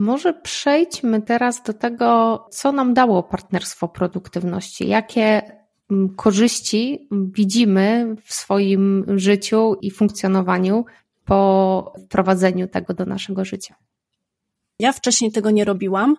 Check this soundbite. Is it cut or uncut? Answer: cut